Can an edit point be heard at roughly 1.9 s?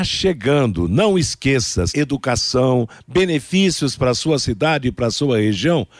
yes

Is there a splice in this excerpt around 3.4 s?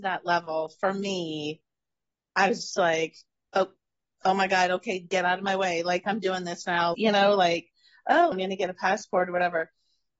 no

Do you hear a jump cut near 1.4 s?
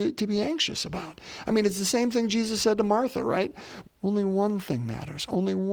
no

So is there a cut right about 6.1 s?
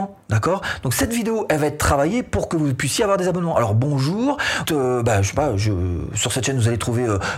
no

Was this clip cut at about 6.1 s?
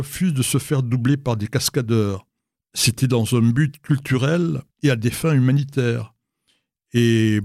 no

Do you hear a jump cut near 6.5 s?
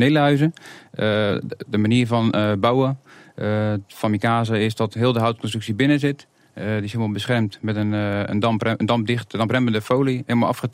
no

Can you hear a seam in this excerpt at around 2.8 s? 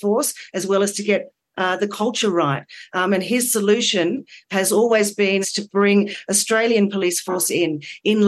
no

